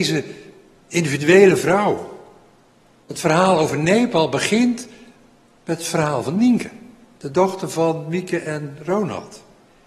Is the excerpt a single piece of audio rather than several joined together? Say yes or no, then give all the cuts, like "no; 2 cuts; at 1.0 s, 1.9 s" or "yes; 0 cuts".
no; 1 cut; at 3.0 s